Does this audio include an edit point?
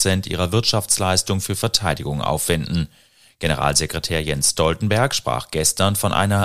no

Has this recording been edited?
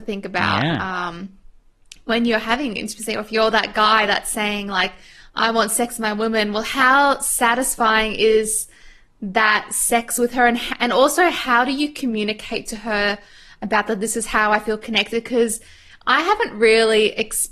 no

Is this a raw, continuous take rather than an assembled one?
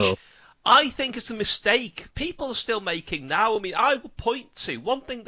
yes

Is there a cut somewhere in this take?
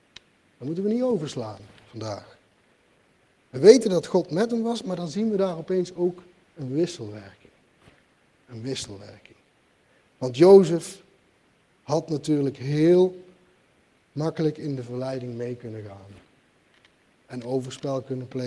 no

